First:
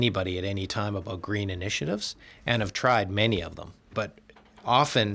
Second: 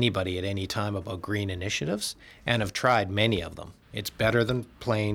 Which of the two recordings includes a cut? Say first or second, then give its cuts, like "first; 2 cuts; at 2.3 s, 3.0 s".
second; 1 cut; at 3.8 s